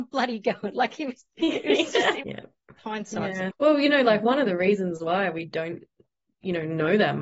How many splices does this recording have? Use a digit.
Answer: 2